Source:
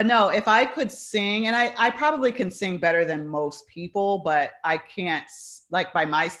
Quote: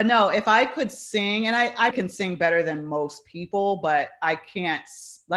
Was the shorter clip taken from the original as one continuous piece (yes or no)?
no